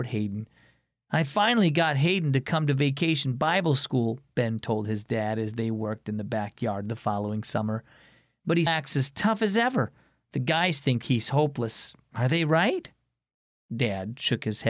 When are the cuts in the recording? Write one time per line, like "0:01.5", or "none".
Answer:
0:08.7